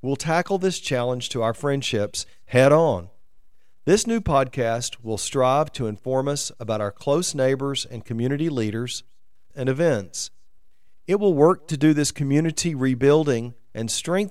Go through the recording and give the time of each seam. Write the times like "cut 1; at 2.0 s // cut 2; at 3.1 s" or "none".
cut 1; at 9.5 s